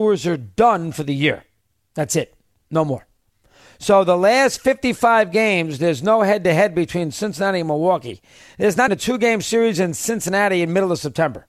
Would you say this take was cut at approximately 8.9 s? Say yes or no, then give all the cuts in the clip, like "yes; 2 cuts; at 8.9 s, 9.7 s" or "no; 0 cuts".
yes; 1 cut; at 8.9 s